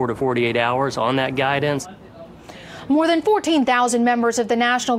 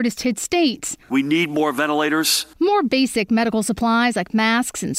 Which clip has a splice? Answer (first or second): second